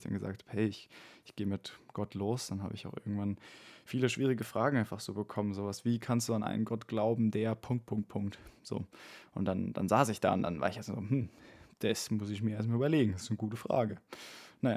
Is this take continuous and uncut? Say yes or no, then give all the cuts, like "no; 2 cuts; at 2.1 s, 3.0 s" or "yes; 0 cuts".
yes; 0 cuts